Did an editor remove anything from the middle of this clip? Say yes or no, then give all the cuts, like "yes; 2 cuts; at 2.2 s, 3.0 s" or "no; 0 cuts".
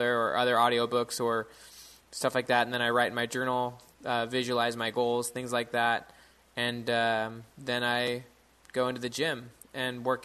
no; 0 cuts